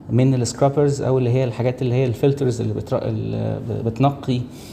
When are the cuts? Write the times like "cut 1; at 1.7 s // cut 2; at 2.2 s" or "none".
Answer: none